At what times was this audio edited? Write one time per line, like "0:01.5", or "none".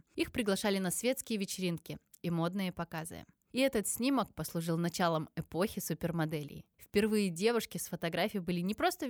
none